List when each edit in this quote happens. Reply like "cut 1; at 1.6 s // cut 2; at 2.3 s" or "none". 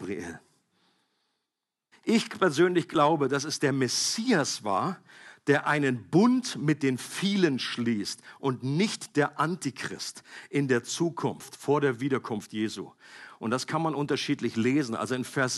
cut 1; at 1.9 s